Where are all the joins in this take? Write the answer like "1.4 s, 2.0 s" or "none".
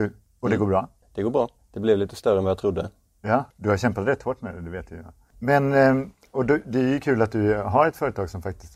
none